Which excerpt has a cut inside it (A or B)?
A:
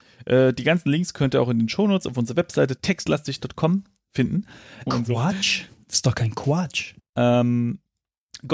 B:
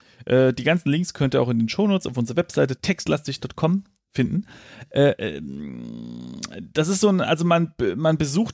A